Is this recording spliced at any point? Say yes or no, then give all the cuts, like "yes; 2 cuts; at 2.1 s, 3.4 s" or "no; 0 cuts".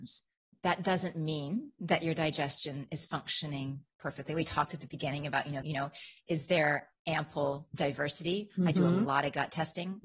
yes; 1 cut; at 5.6 s